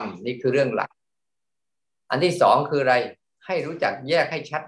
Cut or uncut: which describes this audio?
uncut